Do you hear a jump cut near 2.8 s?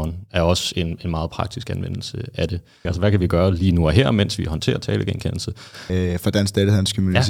yes; 2 cuts; at 2.8 s, 5.9 s

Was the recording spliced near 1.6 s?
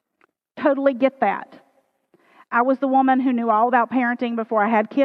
no; 0 cuts

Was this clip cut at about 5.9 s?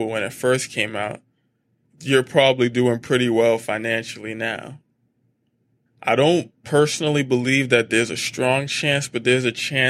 yes; 1 cut; at 5.9 s

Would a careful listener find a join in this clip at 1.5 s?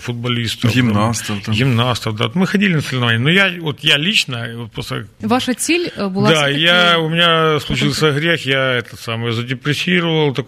no; 0 cuts

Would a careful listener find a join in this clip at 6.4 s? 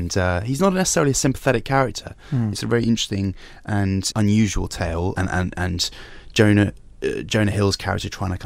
no; 3 cuts; at 2.5 s, 4.1 s, 5.2 s

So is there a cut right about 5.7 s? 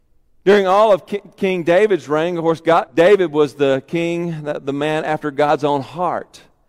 no; 1 cut; at 2.9 s

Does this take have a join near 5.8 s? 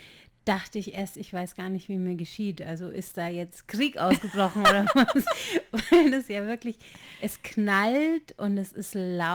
no; 0 cuts

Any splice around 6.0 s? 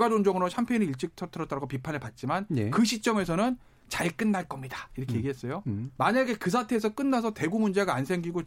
yes; 1 cut; at 6.0 s

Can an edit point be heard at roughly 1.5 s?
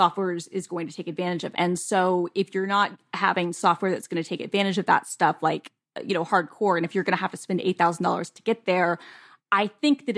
yes; 1 cut; at 1.5 s

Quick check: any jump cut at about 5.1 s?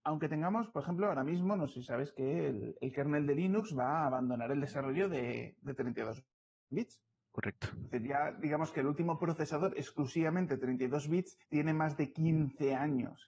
no; 2 cuts; at 7.3 s, 11.4 s

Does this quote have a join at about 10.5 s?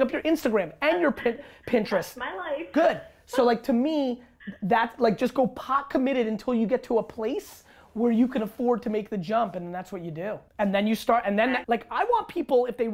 yes; 2 cuts; at 10.5 s, 11.6 s

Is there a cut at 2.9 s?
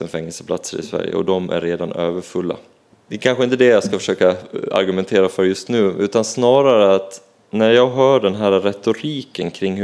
yes; 1 cut; at 2.9 s

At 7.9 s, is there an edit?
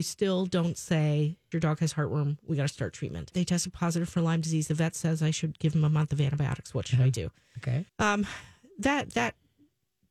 yes; 3 cuts; at 1.5 s, 3.3 s, 7.9 s

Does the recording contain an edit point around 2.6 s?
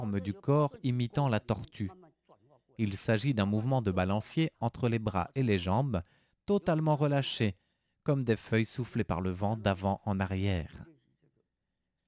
no; 0 cuts

